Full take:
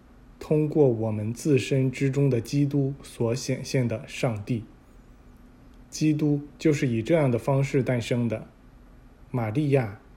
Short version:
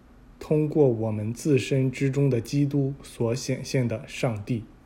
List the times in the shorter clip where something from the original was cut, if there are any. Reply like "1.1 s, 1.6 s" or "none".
none